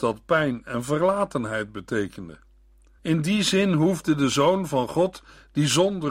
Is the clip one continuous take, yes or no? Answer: no